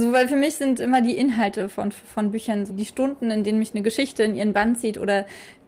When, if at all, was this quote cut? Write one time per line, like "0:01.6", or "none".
0:02.7